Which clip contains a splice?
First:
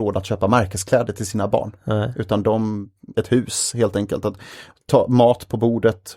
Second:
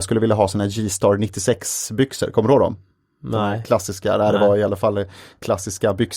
first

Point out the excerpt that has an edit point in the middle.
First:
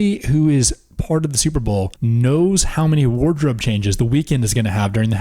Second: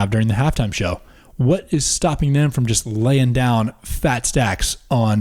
first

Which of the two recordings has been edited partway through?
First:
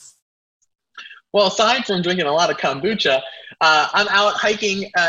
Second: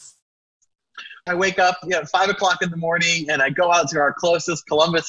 second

